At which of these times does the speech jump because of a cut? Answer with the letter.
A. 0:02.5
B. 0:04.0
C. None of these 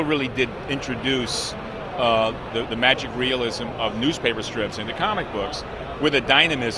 A